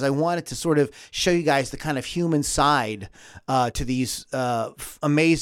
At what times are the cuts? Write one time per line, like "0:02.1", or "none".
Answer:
none

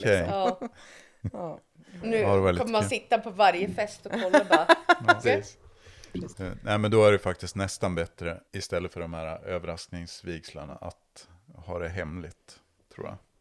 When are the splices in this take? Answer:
0:05.2
0:06.3
0:08.5

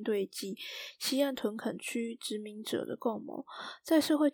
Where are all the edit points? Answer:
none

